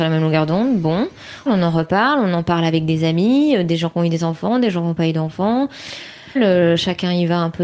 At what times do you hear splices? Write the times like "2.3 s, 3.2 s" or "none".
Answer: 1.5 s, 6.4 s

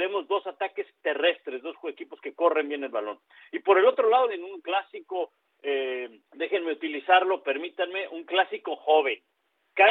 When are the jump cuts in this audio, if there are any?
4.3 s, 6.3 s

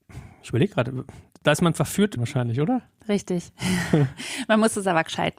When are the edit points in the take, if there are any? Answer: 2.2 s

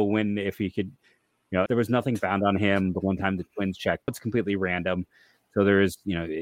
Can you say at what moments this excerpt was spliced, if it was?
1.7 s, 4.1 s

